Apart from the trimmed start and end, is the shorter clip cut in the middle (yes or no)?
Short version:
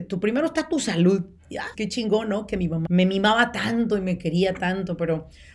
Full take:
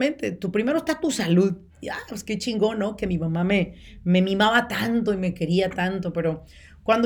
yes